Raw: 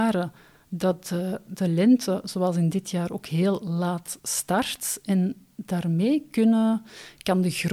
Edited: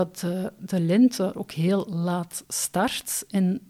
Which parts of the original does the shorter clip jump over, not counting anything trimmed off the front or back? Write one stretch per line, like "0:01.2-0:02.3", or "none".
0:02.2-0:03.1